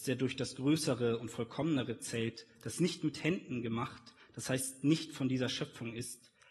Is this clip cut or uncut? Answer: uncut